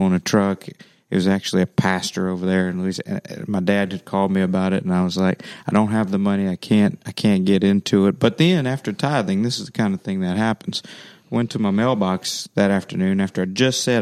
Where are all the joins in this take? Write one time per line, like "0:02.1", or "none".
none